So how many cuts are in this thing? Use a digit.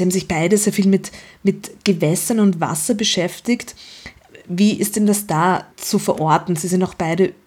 1